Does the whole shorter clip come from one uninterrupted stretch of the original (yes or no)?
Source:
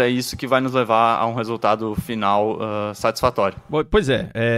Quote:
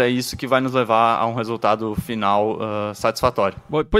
yes